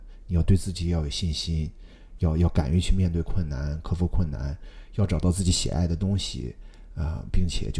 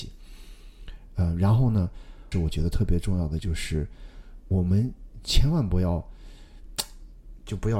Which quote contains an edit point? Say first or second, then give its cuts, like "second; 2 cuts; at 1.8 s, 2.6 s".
second; 2 cuts; at 2.3 s, 4.5 s